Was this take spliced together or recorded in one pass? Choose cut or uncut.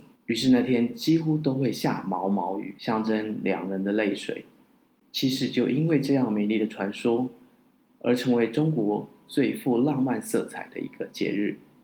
uncut